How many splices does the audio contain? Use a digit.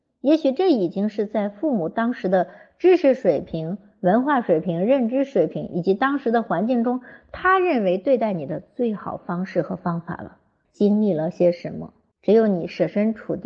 2